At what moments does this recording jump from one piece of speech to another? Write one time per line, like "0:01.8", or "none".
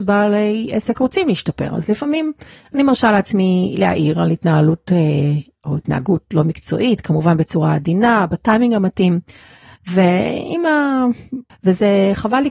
0:11.5